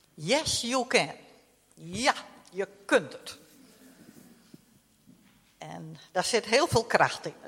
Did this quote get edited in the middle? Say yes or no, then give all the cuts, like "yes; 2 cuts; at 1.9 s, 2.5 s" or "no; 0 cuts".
no; 0 cuts